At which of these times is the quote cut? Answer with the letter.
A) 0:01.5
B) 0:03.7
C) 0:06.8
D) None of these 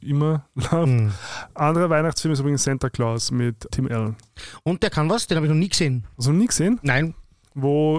B